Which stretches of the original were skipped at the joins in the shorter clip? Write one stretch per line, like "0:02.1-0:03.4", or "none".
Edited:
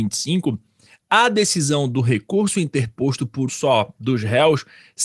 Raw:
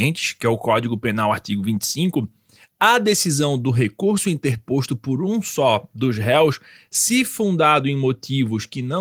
0:05.2-0:05.4